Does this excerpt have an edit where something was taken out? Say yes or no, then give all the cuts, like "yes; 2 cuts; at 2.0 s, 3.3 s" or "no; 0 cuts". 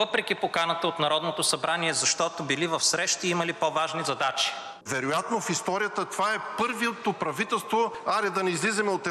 no; 0 cuts